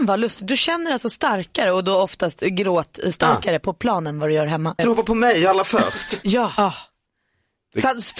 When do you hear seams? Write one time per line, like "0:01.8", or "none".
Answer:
0:04.8
0:06.2